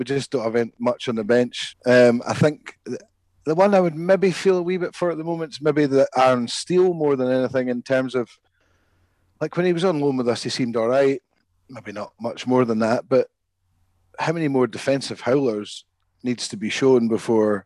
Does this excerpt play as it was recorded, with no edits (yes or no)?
no